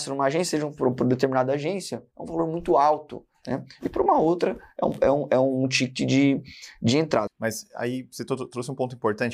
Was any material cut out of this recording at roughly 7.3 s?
yes; 1 cut; at 7.3 s

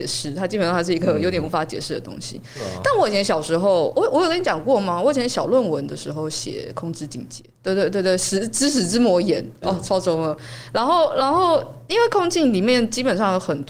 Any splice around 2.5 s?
no; 3 cuts; at 3.9 s, 7.5 s, 9.6 s

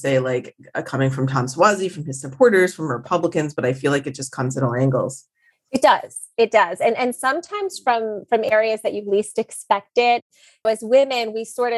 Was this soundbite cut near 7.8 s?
no; 1 cut; at 10.6 s

